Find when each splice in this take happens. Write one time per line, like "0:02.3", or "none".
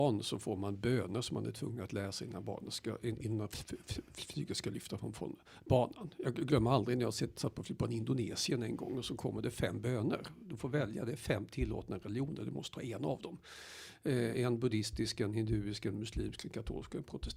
none